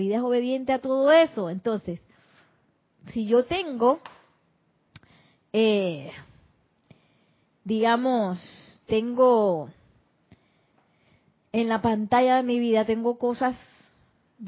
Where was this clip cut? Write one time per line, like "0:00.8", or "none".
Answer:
none